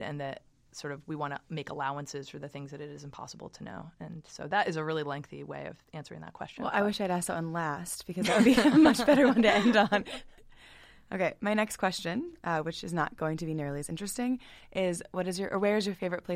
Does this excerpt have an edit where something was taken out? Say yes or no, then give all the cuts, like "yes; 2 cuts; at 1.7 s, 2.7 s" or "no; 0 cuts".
yes; 1 cut; at 5.8 s